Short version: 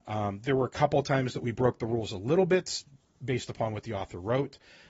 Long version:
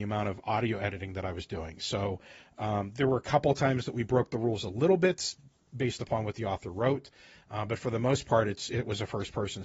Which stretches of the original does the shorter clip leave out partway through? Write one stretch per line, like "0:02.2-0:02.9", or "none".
none